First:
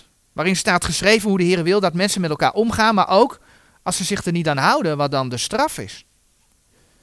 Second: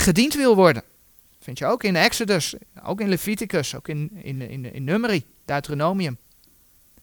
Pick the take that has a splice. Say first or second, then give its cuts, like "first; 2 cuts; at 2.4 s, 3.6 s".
second; 1 cut; at 4.2 s